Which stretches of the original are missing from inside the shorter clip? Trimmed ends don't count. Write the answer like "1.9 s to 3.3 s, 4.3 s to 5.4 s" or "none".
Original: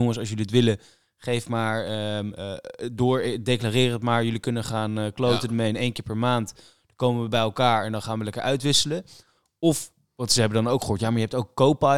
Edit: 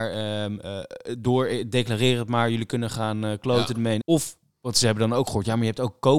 5.7 s to 9.6 s